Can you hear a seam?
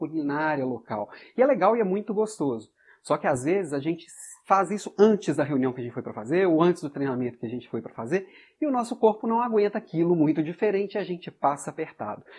no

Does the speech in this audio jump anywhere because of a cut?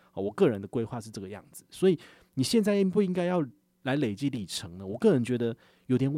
no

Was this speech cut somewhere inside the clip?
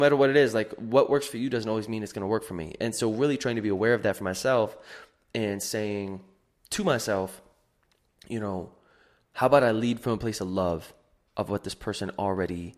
no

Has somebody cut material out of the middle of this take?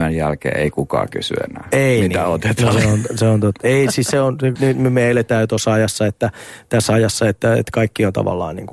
yes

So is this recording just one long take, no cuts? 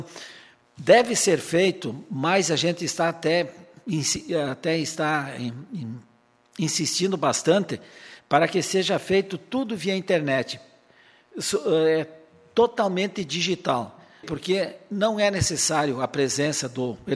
no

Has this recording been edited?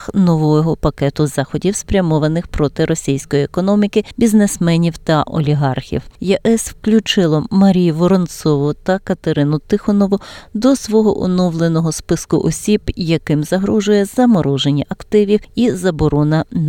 no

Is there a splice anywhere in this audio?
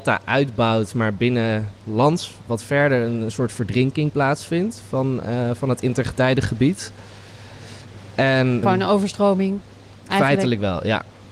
yes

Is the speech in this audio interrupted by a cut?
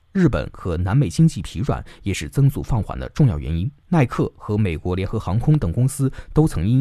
yes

